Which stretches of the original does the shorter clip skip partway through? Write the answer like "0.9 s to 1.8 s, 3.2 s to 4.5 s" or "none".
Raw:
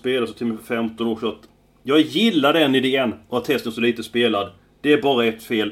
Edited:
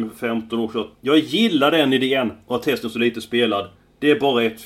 1.4 s to 1.8 s